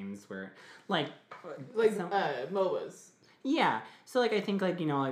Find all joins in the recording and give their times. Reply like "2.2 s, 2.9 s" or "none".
none